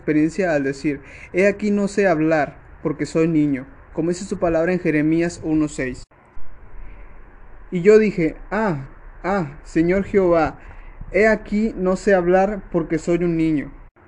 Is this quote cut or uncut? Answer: uncut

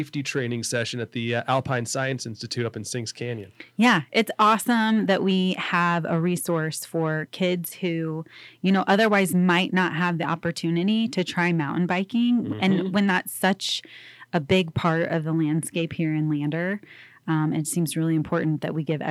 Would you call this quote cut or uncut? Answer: uncut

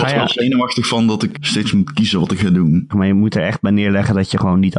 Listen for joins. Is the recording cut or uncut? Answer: cut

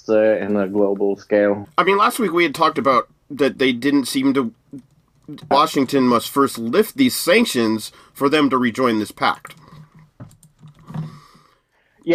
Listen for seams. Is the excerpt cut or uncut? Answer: cut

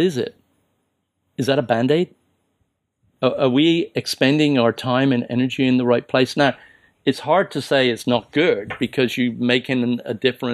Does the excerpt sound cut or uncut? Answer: uncut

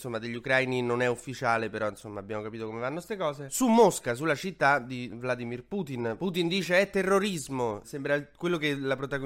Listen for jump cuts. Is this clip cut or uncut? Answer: cut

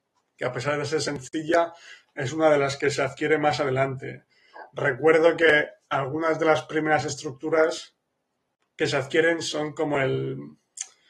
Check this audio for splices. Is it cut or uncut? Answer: uncut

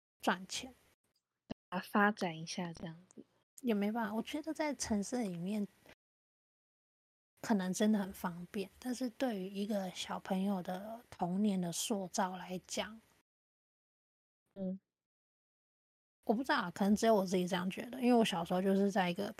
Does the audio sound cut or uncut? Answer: cut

